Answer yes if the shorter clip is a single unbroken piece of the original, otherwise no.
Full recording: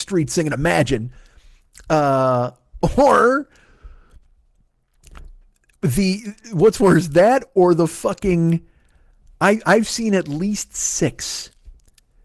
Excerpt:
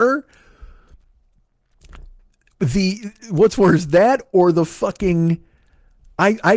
yes